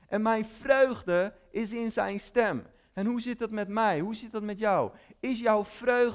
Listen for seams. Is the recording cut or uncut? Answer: uncut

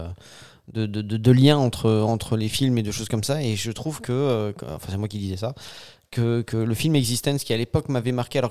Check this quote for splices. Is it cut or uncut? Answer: uncut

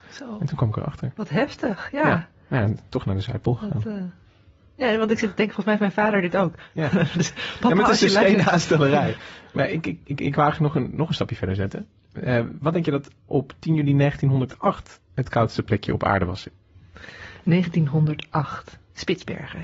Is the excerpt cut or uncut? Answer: uncut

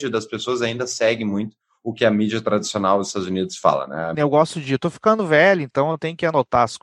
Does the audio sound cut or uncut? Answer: cut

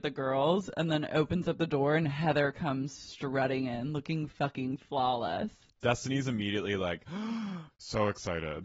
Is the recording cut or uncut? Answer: uncut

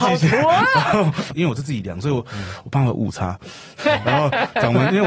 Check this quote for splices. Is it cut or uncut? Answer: cut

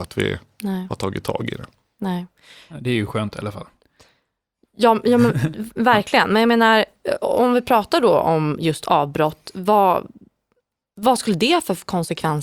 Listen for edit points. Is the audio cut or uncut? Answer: uncut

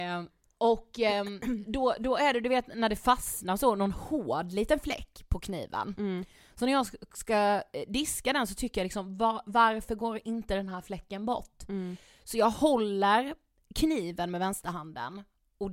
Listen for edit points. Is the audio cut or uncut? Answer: uncut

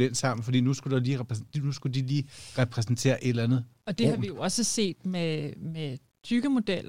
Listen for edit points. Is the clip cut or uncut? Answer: uncut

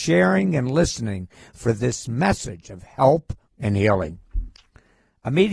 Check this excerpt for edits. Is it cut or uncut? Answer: cut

